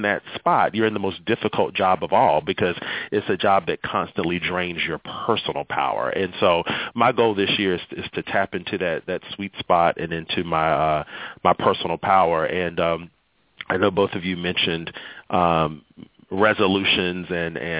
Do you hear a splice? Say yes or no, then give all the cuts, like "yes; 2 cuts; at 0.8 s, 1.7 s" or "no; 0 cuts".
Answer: no; 0 cuts